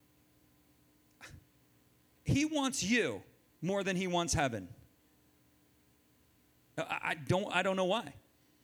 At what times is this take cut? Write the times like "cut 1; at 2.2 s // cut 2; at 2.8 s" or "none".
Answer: none